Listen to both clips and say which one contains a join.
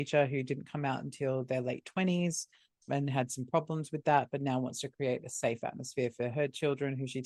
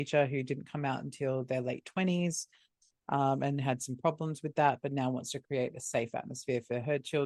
first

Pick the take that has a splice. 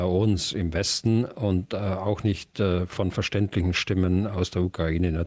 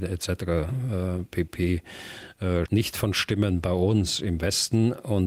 second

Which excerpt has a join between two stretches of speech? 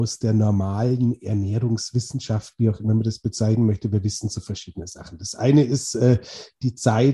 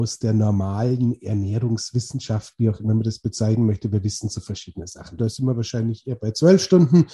second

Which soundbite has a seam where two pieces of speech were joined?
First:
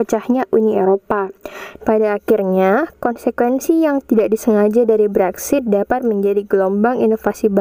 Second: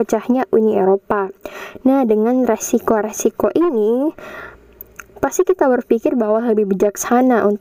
first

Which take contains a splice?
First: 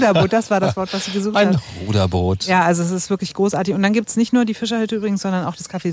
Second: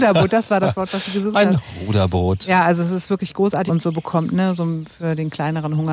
second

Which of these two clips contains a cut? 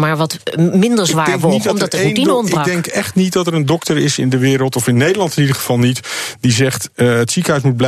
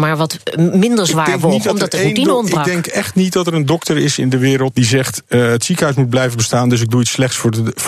second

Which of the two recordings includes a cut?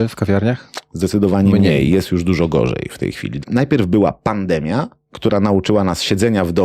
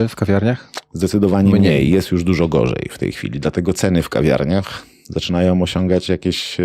first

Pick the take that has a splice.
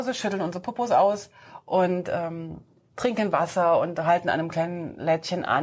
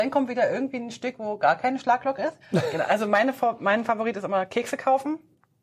second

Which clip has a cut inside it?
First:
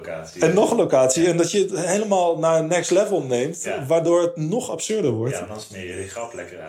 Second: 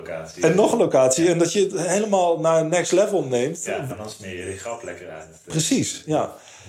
second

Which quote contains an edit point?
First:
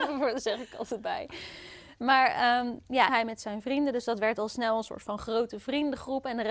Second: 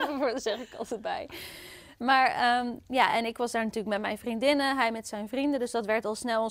first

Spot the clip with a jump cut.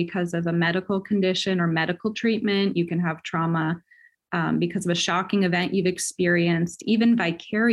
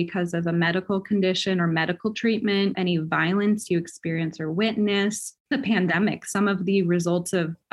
second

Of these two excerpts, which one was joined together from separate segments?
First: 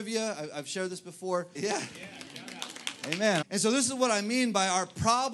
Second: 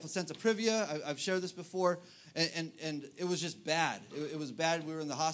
first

